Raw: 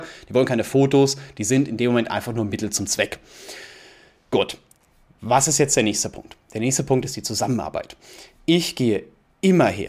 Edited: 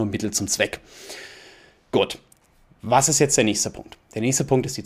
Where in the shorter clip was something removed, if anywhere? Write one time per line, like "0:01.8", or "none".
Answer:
none

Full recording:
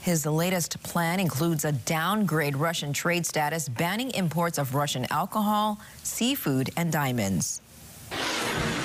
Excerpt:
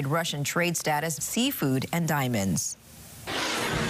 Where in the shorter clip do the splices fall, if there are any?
0:01.2

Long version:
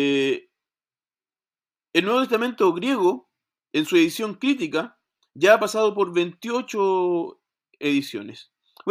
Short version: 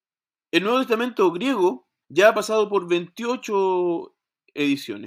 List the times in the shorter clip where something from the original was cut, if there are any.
0:02.0

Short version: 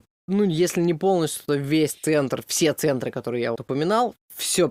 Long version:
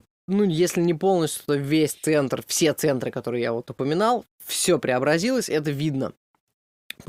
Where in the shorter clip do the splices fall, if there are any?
0:03.5

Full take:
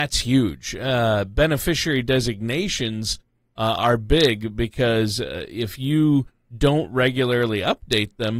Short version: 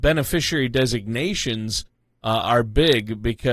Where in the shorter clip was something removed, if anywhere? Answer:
none

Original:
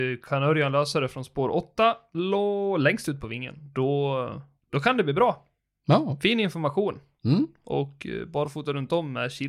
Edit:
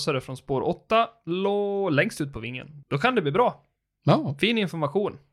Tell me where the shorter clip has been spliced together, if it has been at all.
0:02.8

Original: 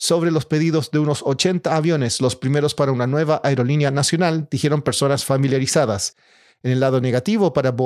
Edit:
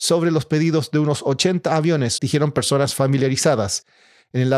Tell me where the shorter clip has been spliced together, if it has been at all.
0:02.2

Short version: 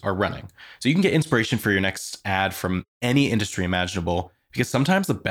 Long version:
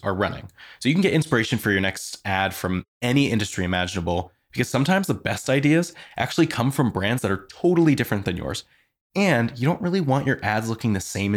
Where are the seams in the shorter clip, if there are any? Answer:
none

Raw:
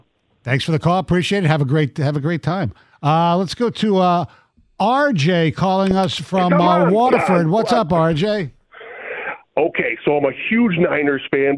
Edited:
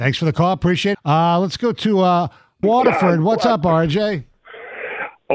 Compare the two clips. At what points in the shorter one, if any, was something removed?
0:00.9
0:02.6

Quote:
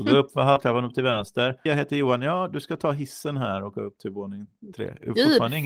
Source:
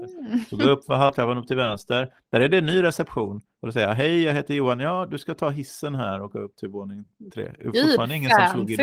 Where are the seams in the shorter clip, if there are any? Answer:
0:01.7

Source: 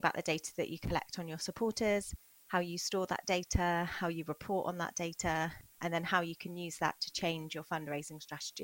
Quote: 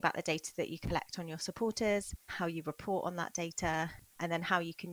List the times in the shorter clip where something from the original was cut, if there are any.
0:02.3

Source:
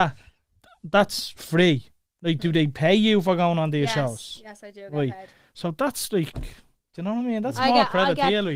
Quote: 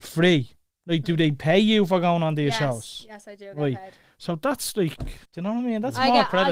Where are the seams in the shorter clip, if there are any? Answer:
0:05.3

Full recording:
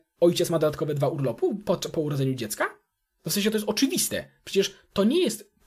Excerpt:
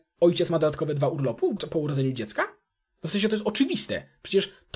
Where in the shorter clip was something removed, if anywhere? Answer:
0:01.6

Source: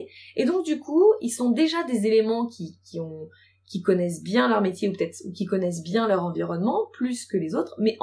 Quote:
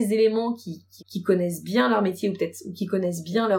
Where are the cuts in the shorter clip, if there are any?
0:01.0

